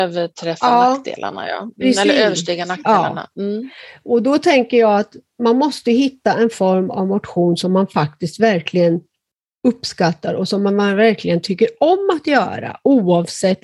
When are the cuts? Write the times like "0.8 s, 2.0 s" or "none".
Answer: none